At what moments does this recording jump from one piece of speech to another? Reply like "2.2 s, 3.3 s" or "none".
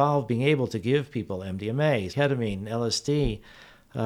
2.1 s